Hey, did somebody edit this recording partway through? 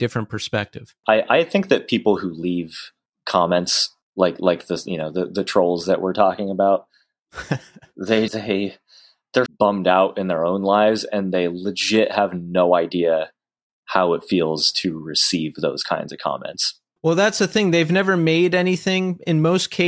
yes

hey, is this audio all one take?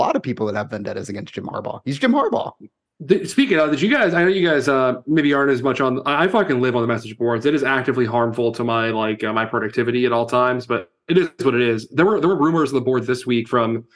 yes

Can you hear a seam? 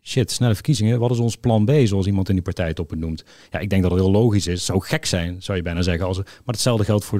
no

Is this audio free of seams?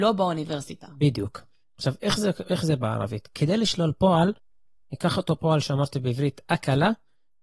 yes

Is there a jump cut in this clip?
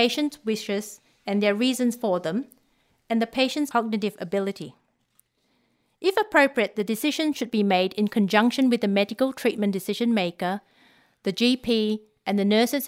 no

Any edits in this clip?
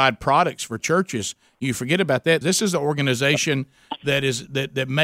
yes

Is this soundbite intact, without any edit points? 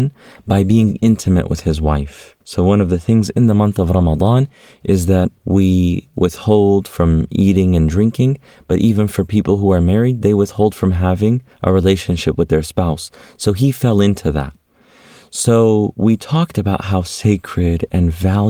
no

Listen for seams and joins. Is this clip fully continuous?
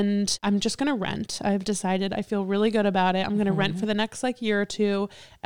yes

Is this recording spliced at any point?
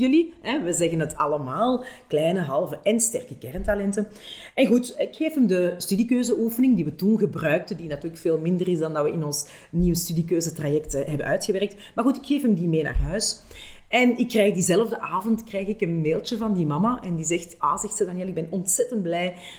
no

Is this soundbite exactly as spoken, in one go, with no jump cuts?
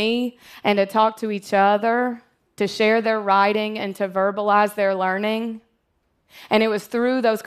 yes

